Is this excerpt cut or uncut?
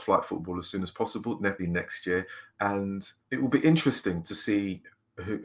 cut